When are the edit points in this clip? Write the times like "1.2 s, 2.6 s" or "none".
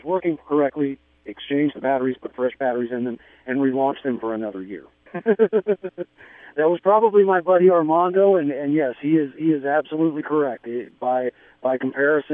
5.1 s